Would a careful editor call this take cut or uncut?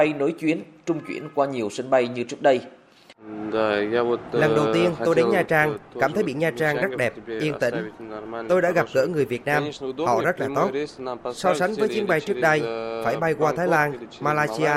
uncut